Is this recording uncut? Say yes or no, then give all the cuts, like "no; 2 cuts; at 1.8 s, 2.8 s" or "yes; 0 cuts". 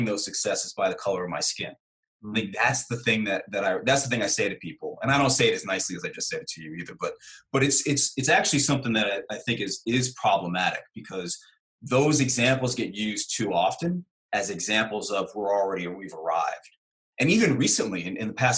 yes; 0 cuts